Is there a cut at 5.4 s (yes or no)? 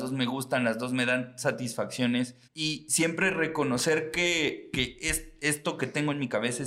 no